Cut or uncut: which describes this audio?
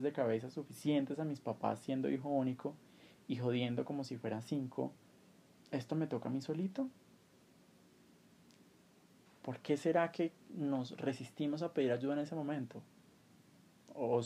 cut